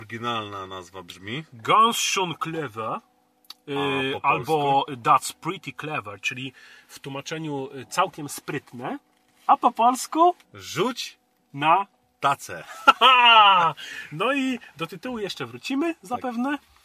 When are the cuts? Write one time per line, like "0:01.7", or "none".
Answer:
0:10.4